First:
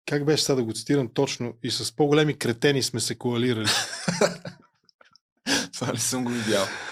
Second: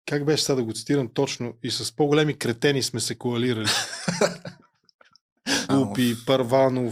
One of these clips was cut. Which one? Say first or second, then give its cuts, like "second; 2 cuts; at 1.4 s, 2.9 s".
second; 1 cut; at 5.7 s